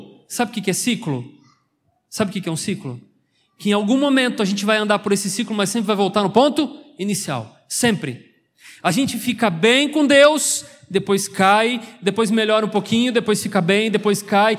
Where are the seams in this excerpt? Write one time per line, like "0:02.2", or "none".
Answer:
none